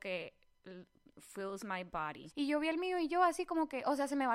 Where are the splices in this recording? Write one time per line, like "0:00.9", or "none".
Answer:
0:02.3